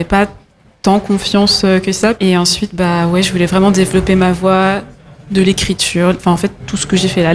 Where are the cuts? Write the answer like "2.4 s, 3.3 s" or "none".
2.1 s